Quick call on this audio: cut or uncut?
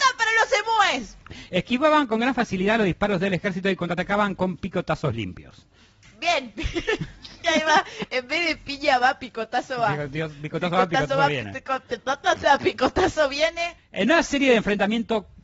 cut